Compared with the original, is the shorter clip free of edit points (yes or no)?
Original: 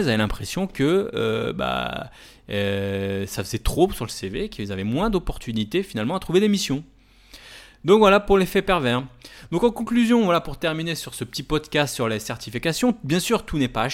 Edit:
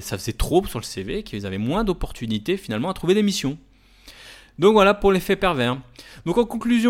yes